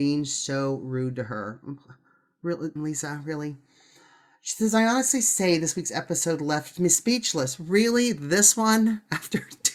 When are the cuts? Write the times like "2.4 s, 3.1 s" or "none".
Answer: 2.8 s